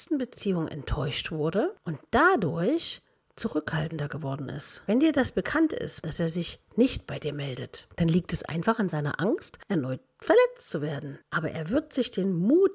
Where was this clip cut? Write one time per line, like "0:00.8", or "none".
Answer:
0:06.0